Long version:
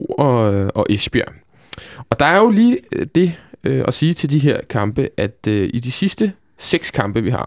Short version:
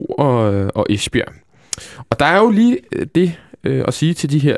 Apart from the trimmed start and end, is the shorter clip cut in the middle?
no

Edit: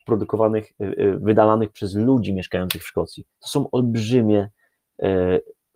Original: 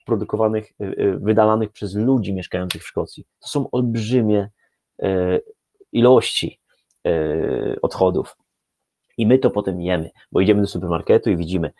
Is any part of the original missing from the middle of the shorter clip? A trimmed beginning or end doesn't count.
no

